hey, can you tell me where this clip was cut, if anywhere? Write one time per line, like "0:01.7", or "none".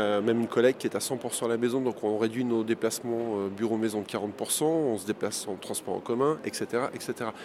none

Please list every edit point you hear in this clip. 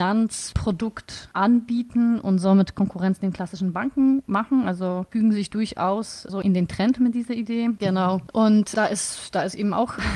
0:07.8

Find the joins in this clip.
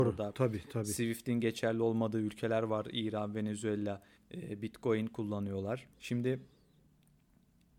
0:04.2
0:05.9

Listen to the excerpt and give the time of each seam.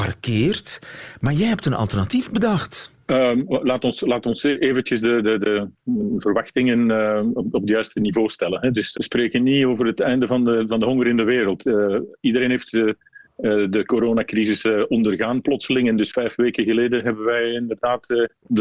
0:03.0
0:08.9

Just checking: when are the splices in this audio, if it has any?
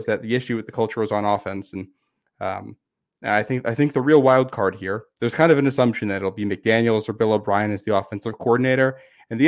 none

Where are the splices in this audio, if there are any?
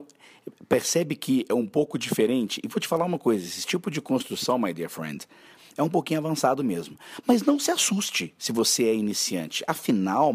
none

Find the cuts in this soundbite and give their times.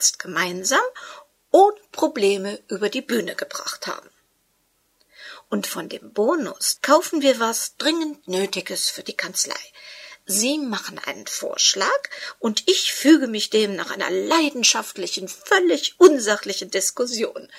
0:06.8

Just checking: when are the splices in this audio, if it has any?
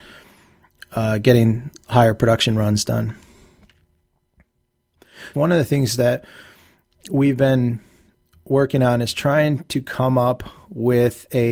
0:05.3

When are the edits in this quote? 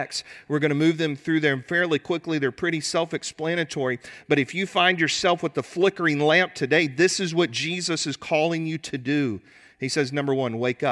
none

